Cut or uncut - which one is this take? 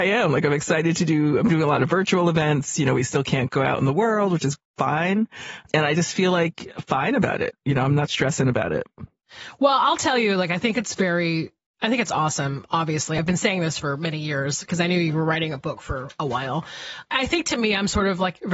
uncut